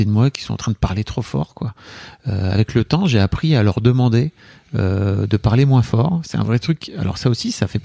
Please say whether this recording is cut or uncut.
uncut